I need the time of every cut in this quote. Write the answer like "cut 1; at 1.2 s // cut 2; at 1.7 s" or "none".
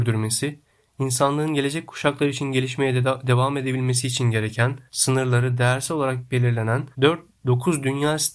cut 1; at 4.9 s // cut 2; at 6.9 s